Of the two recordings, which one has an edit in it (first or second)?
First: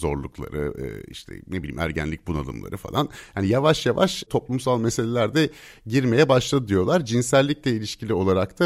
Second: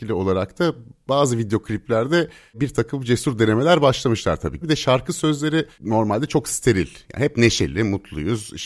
second